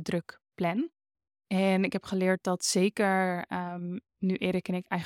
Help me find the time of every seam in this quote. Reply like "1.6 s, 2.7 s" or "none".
none